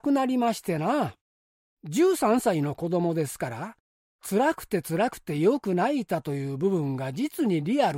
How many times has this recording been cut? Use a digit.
1